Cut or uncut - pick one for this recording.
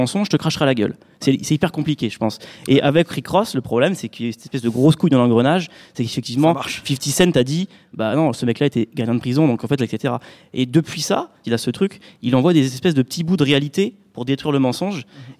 cut